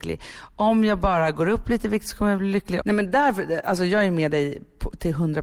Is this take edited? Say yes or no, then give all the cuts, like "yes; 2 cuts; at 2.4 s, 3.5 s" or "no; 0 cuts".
yes; 1 cut; at 2.8 s